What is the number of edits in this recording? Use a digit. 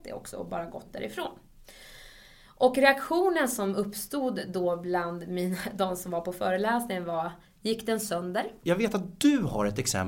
2